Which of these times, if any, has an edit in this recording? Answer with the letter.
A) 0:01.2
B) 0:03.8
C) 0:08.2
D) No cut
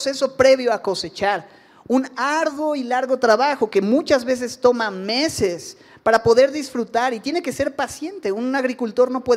D